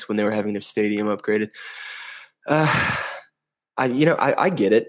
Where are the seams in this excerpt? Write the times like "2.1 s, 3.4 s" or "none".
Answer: none